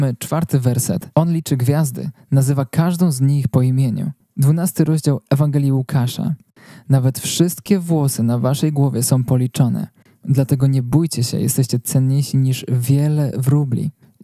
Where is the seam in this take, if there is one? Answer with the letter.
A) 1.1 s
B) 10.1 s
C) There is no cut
A